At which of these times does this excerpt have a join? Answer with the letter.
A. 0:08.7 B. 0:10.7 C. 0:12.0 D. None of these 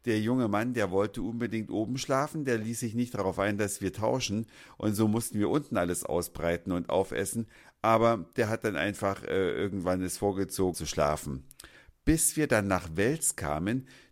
B